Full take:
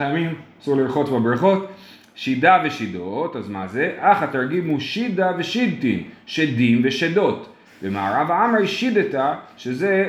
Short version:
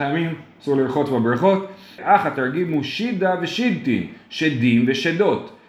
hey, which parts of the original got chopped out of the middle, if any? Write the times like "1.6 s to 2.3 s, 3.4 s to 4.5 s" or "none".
2.0 s to 3.9 s